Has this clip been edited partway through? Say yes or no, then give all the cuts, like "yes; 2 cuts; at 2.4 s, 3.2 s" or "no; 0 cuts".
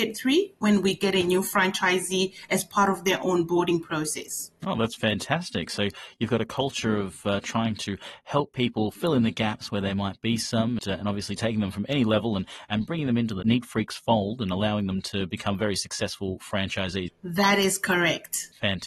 yes; 2 cuts; at 10.8 s, 17.1 s